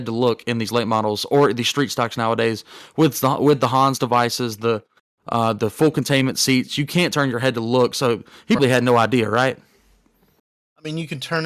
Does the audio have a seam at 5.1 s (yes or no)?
no